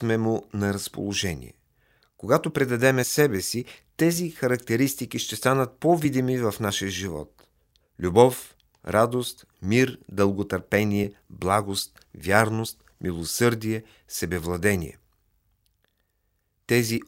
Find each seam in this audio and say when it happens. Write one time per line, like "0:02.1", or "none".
none